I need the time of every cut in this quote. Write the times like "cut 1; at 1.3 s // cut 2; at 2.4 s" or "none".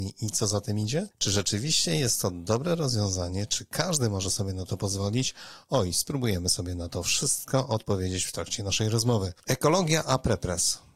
cut 1; at 1.1 s